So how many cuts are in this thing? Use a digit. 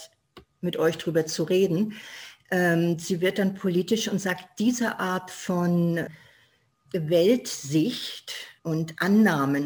1